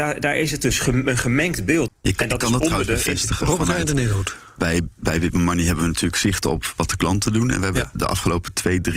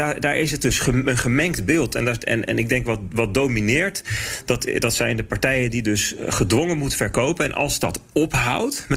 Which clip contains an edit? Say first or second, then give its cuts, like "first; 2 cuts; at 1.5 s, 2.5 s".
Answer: first; 1 cut; at 1.9 s